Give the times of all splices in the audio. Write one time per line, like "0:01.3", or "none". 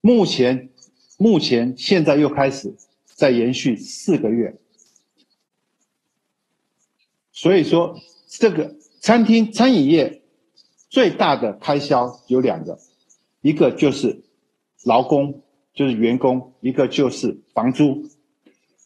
none